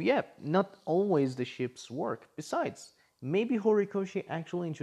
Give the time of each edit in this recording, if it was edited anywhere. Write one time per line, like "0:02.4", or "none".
none